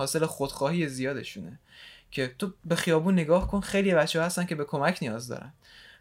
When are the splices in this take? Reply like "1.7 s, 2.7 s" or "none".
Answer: none